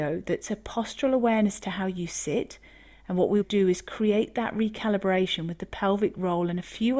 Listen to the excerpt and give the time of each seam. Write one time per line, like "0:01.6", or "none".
0:03.4